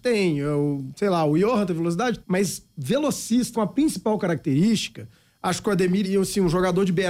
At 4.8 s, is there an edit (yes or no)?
no